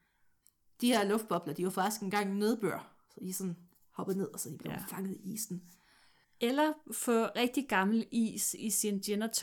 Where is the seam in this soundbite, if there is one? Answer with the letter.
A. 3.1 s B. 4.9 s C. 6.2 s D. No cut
C